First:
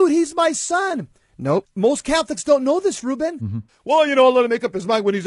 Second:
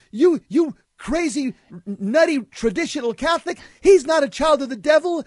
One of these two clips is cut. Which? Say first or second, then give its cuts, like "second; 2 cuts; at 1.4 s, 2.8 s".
first; 2 cuts; at 1.6 s, 3.7 s